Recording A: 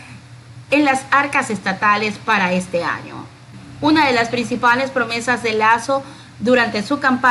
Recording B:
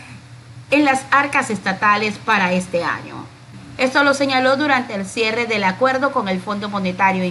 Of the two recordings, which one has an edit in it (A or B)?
B